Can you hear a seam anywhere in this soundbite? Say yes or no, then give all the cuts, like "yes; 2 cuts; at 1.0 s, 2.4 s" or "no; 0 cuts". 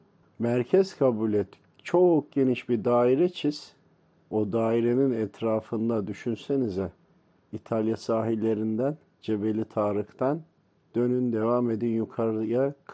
no; 0 cuts